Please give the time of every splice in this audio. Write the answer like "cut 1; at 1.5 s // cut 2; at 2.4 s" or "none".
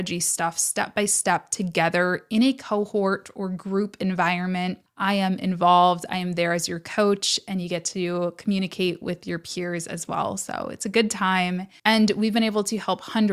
cut 1; at 4.9 s